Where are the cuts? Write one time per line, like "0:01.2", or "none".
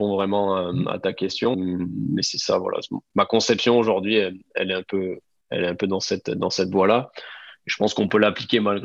0:01.5